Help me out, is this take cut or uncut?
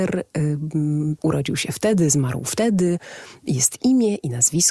cut